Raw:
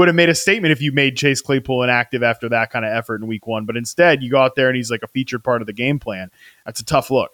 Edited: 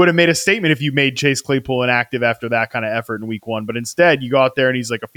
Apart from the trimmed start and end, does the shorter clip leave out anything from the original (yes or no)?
no